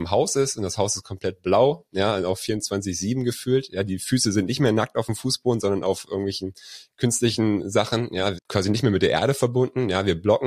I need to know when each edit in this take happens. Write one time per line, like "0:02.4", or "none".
0:08.4